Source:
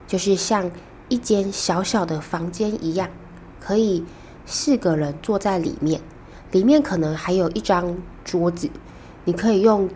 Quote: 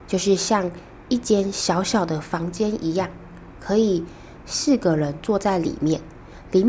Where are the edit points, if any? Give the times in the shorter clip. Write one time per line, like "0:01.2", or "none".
none